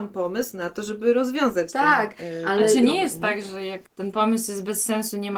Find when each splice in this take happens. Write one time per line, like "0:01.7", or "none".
0:03.9